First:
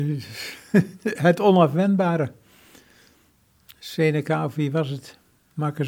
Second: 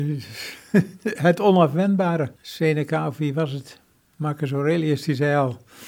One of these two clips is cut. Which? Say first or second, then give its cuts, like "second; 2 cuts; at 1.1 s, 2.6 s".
second; 1 cut; at 2.4 s